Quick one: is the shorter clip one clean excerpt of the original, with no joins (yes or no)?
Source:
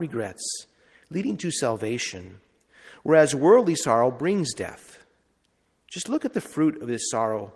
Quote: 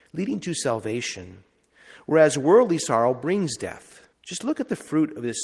no